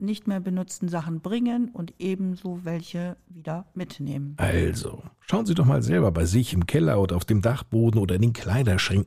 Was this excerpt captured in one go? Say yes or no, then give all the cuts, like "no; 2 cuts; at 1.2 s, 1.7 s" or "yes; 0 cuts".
yes; 0 cuts